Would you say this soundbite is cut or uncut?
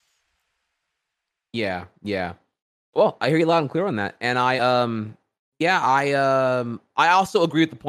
uncut